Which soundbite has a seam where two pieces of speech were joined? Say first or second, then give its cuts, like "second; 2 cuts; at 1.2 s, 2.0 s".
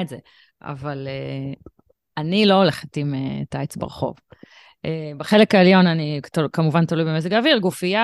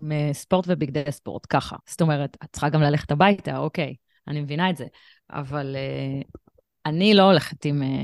second; 1 cut; at 1.8 s